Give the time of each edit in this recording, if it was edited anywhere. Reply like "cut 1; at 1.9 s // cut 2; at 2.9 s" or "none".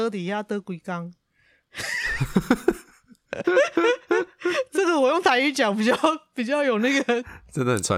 cut 1; at 3.4 s